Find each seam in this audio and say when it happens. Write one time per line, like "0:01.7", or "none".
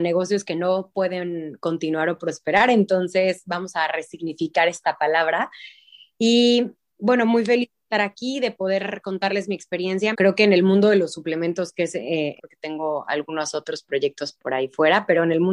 0:10.1
0:12.4

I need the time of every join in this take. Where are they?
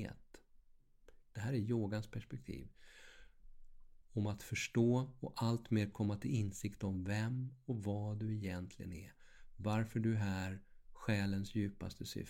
0:01.2
0:04.0

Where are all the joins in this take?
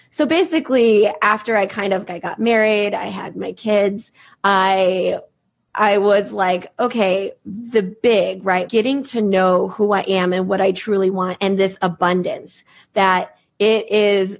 0:02.1
0:08.7

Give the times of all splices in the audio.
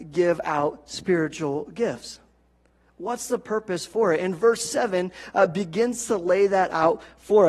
none

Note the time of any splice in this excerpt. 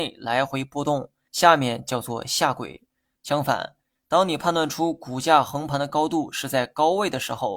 0:01.3
0:03.2

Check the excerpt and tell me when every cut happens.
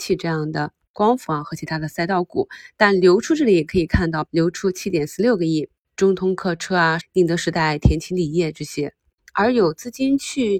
0:04.3
0:07.0
0:09.2

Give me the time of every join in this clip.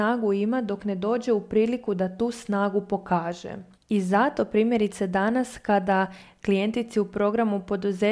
none

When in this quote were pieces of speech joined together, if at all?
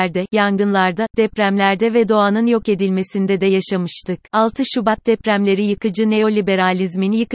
0:04.2

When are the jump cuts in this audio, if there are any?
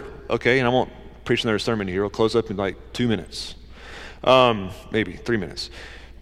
none

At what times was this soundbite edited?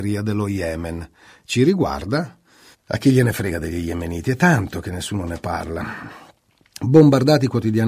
0:02.7

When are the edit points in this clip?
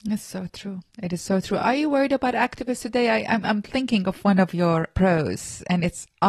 none

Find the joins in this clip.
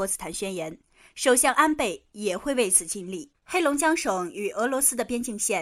0:03.3

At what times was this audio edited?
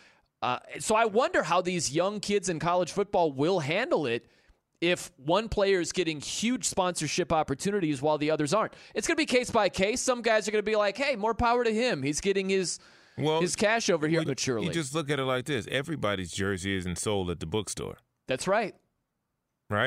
0:14.3

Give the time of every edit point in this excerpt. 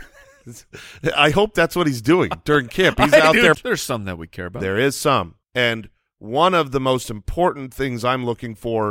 0:03.5
0:05.4

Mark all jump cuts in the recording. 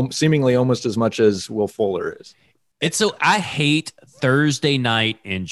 none

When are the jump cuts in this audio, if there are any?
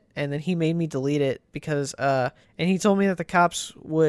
0:02.4

